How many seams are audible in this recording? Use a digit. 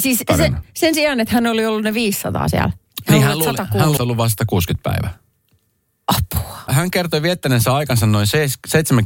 2